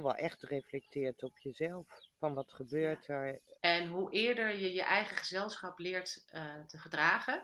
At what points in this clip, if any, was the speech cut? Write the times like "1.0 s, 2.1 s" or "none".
2.1 s, 3.5 s